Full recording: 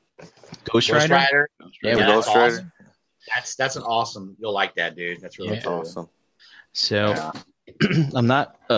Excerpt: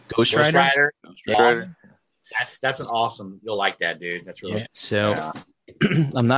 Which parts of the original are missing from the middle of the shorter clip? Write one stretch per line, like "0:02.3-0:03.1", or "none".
0:01.9-0:02.3
0:05.6-0:06.7